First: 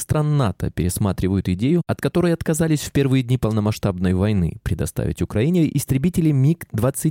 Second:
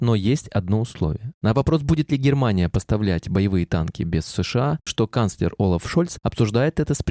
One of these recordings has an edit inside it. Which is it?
second; 2 cuts; at 1.4 s, 4.9 s

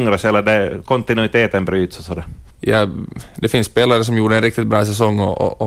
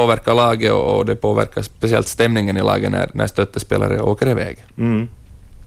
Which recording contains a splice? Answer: first; 1 cut; at 2.5 s

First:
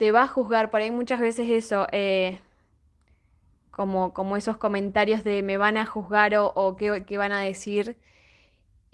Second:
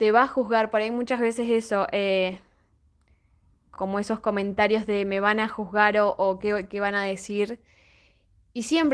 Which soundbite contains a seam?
second; 1 cut; at 3.8 s

